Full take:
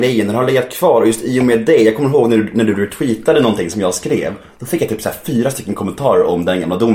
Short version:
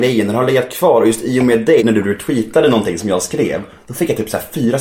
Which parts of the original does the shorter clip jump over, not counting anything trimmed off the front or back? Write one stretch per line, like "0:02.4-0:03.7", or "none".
0:01.8-0:02.5